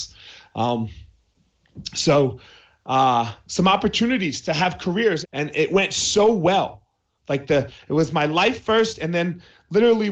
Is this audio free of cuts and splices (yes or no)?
no